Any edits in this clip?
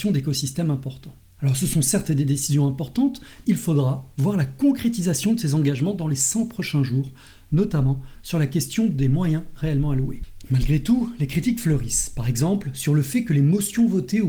yes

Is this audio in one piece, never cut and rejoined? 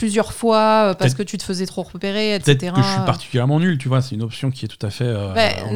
yes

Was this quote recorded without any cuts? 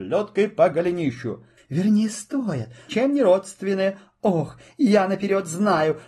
no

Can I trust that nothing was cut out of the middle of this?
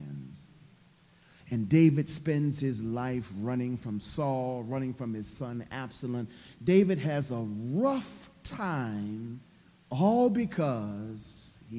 no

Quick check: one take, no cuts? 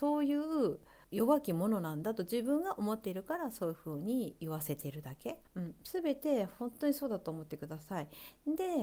no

